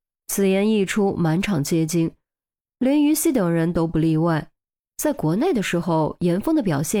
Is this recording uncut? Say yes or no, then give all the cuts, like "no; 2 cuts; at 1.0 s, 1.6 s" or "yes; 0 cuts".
yes; 0 cuts